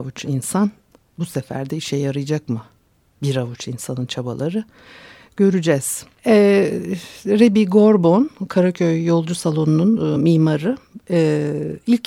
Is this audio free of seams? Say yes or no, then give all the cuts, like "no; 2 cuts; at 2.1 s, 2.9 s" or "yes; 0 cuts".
yes; 0 cuts